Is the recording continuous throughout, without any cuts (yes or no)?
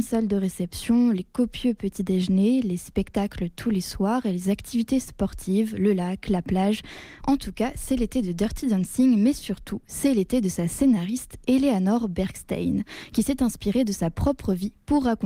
no